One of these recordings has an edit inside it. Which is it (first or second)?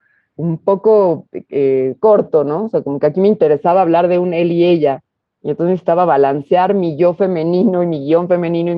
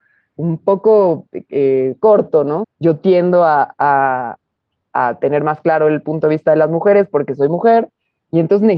second